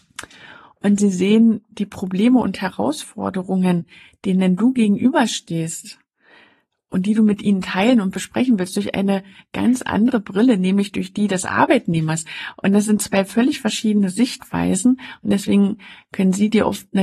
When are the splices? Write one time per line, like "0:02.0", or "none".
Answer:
none